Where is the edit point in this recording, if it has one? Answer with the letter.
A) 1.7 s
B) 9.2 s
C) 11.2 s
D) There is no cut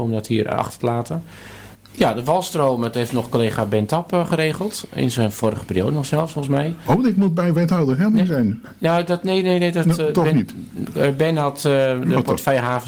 A